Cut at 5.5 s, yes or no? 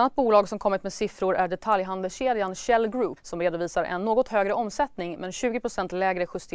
no